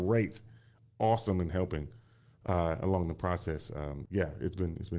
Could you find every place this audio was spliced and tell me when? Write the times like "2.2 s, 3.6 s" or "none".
none